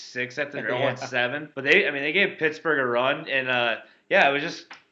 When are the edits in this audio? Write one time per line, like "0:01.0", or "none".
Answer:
0:01.5